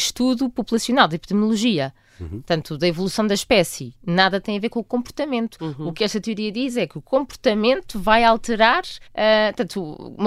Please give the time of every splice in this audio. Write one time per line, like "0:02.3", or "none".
0:09.1